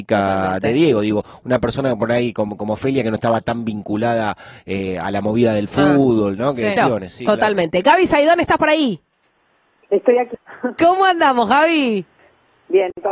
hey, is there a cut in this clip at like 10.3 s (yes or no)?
yes